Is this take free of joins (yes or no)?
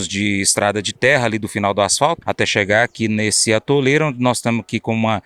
no